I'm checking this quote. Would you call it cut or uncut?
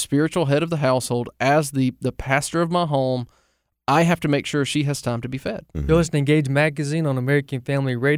uncut